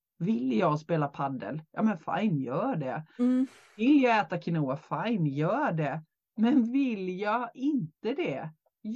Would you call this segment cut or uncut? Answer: uncut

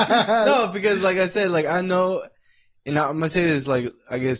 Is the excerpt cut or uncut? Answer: uncut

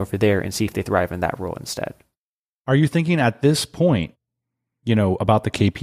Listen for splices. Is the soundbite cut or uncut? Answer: uncut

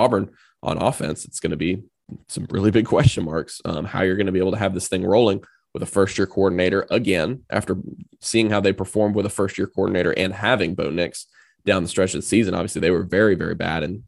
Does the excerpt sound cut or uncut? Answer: uncut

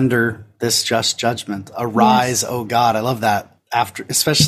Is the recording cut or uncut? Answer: uncut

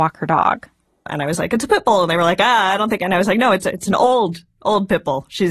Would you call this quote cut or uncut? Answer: uncut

